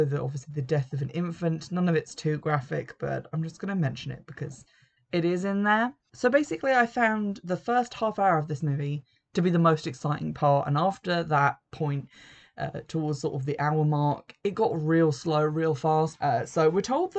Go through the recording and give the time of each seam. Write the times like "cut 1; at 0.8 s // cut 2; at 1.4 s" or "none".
cut 1; at 16.2 s